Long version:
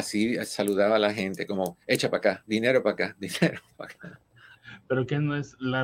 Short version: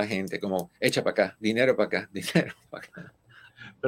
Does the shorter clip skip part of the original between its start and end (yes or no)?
no